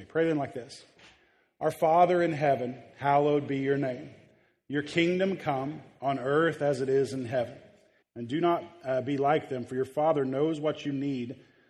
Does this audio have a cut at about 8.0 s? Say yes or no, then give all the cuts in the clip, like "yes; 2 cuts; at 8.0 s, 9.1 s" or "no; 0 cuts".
yes; 2 cuts; at 6.0 s, 8.0 s